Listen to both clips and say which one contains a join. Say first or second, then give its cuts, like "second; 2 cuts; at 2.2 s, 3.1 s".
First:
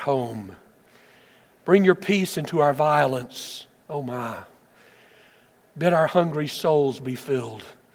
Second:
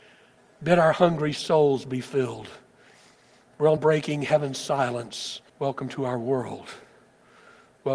second; 2 cuts; at 3.8 s, 5.5 s